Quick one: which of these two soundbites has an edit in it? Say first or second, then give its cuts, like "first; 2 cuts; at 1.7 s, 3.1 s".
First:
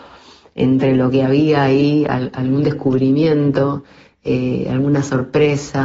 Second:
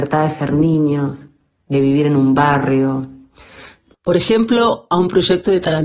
second; 1 cut; at 3.9 s